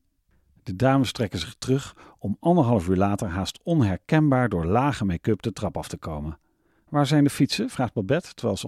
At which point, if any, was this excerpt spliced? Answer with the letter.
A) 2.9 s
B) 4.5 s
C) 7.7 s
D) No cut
D